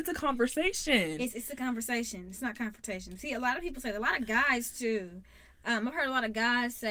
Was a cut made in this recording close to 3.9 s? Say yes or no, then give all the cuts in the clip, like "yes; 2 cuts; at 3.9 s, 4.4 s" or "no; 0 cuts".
no; 0 cuts